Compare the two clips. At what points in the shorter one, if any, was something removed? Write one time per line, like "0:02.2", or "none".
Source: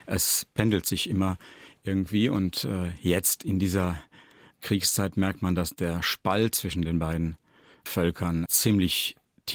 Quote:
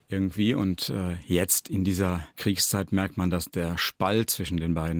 0:02.3